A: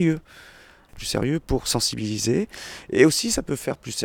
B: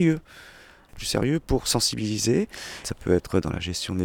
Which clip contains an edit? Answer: B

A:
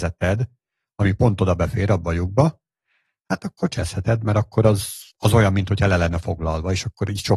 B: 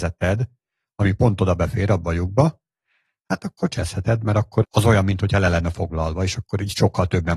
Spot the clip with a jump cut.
B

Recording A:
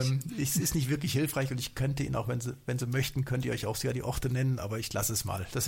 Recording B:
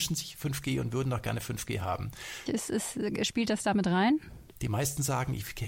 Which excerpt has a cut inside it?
B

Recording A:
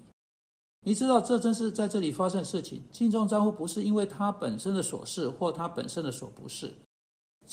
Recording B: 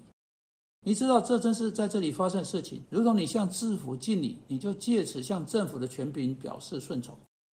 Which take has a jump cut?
B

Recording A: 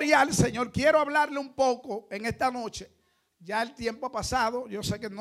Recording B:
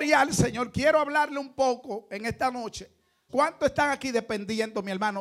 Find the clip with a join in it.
B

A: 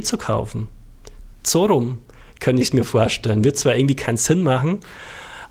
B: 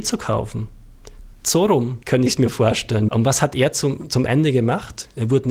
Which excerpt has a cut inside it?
B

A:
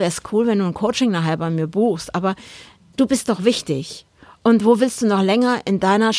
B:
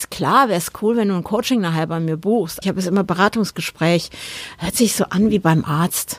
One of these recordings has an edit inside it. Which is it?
B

